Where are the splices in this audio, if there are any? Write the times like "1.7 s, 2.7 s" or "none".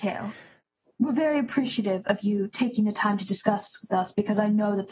none

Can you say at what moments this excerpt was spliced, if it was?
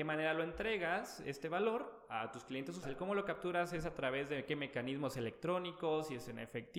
2.8 s

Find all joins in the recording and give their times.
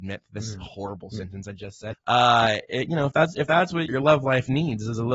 1.9 s, 3.9 s

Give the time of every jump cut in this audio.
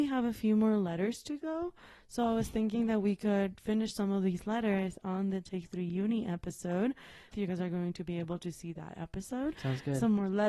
7.3 s, 9.5 s

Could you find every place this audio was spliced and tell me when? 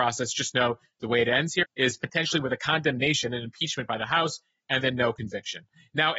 1.6 s

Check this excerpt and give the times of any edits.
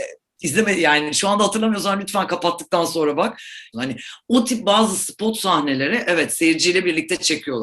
3.7 s

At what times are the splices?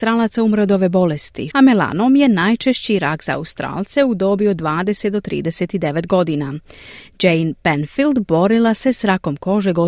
1.5 s

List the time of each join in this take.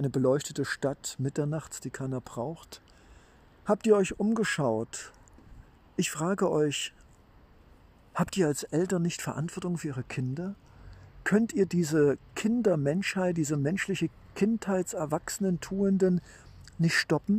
none

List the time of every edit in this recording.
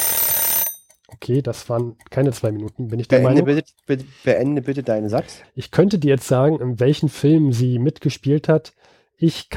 5.4 s

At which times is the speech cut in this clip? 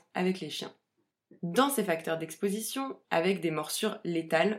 3.0 s

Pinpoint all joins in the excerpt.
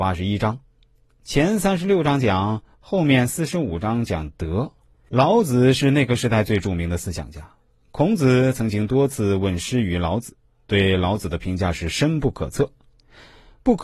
5.1 s

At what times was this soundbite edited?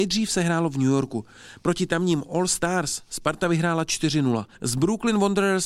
4.5 s

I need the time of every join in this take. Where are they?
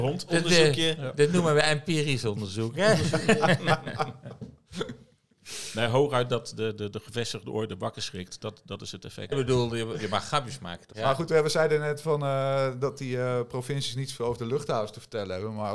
9.3 s, 10.9 s

